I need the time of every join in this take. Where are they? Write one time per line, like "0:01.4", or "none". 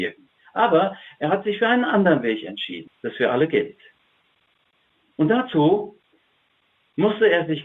0:02.9